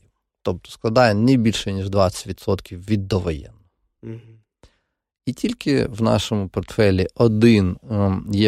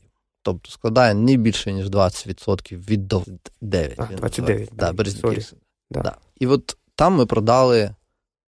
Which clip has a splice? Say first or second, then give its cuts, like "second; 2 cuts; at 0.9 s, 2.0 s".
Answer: second; 1 cut; at 3.2 s